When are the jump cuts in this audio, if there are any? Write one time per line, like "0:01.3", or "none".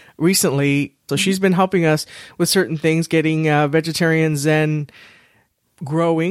0:01.1